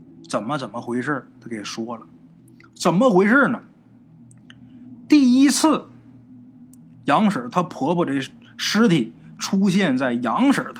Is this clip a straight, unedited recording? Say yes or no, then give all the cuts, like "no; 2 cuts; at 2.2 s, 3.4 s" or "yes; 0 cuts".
yes; 0 cuts